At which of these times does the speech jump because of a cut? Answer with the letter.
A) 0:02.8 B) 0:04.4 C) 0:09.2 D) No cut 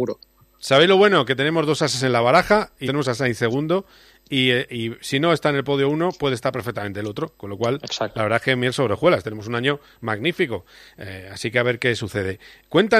A